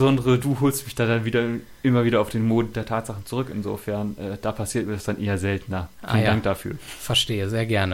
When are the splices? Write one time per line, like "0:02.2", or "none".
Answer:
none